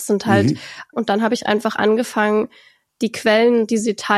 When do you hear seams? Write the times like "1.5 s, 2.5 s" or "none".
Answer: 0.9 s